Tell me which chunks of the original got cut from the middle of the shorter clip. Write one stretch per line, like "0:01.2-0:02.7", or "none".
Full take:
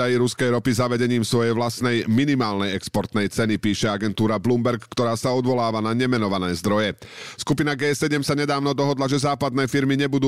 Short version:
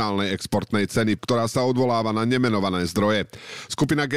0:03.6-0:04.9